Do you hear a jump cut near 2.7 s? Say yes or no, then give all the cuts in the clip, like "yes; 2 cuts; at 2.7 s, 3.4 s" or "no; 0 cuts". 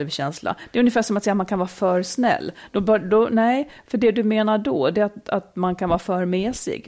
no; 0 cuts